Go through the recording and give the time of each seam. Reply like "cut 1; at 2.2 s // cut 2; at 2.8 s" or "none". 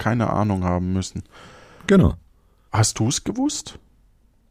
cut 1; at 2.7 s

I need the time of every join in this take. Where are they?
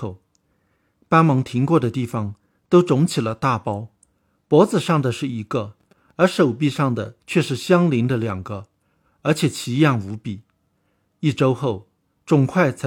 none

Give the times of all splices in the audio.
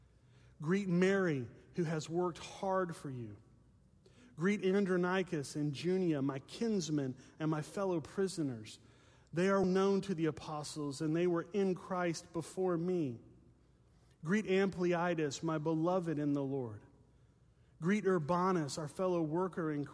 cut 1; at 9.6 s

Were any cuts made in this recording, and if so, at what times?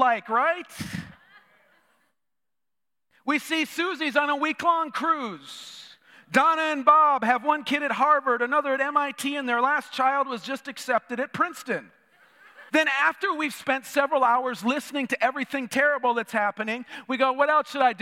cut 1; at 12.7 s

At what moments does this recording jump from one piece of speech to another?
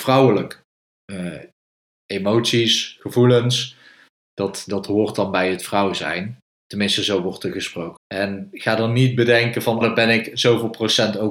cut 1; at 8.0 s // cut 2; at 9.8 s

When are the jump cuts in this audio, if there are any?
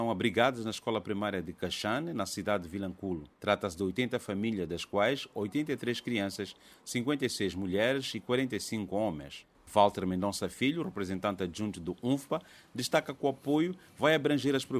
cut 1; at 3.3 s // cut 2; at 9.5 s

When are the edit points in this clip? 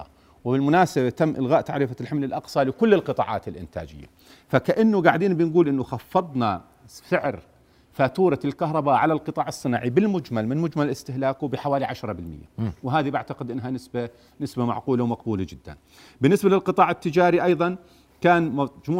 none

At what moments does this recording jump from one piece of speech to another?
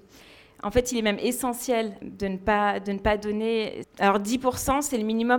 cut 1; at 2.0 s // cut 2; at 3.8 s

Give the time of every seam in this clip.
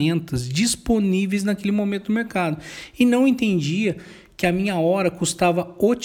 none

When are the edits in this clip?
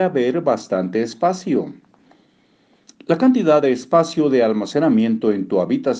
none

